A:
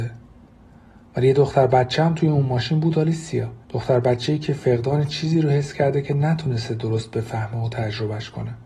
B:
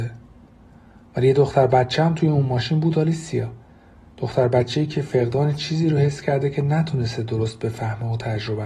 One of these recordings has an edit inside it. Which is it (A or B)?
A